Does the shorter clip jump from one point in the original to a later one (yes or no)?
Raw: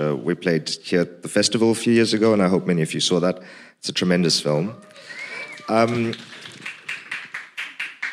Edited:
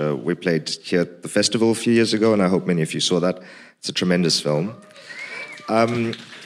no